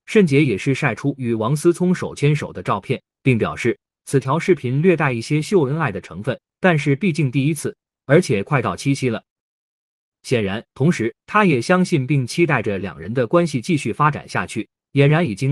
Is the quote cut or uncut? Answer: cut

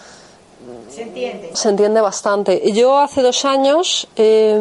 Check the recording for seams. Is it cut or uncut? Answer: cut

